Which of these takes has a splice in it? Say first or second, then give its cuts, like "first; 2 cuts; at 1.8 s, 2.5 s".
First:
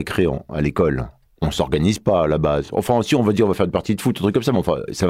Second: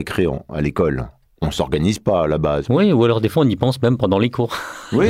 second; 1 cut; at 2.7 s